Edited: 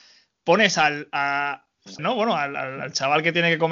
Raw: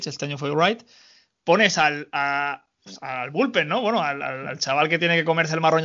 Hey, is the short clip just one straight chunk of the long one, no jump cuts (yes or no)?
no